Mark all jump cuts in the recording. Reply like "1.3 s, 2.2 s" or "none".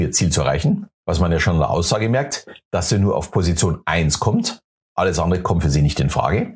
0.9 s